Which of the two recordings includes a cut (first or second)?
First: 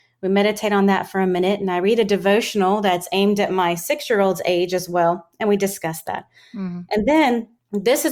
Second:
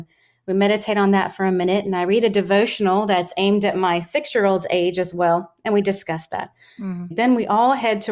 second